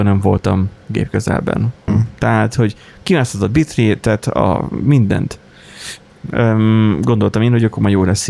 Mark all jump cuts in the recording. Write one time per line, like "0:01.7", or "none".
0:01.9
0:06.1

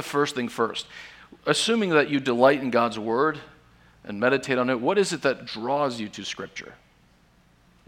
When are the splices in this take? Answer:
0:01.4

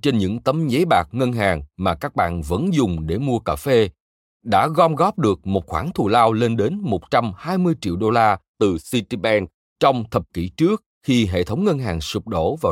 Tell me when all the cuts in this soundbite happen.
none

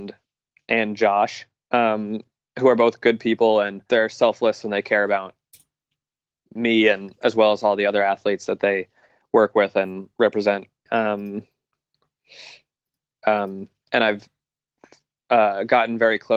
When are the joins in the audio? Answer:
0:10.9
0:13.1

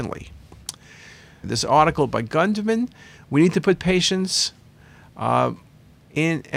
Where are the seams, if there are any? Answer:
0:01.4

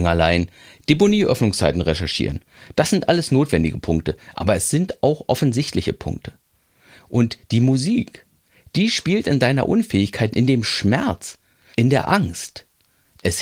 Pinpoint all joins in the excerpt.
0:10.3
0:11.7

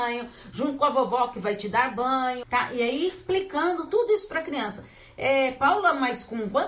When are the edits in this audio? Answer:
0:02.4

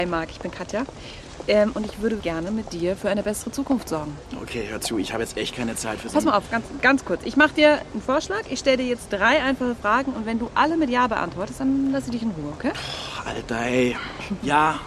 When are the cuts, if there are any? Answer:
0:02.2

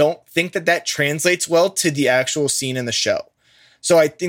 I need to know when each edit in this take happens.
none

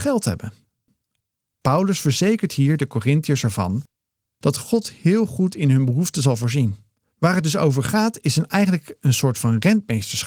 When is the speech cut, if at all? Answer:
0:07.0

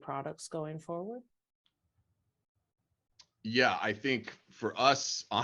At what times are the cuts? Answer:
none

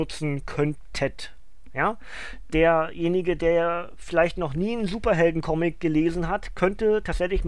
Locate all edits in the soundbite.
none

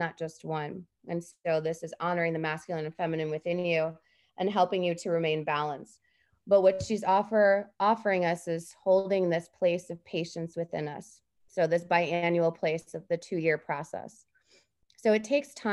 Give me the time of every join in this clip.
0:01.0

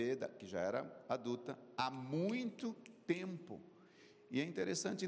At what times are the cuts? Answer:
none

